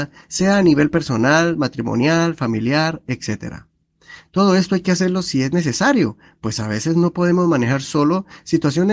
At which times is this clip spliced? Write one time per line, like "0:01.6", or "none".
none